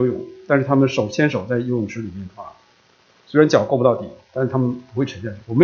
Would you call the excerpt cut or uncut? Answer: uncut